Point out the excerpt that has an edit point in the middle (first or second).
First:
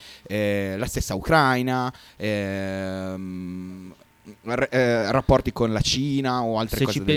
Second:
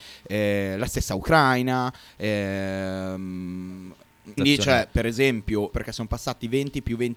second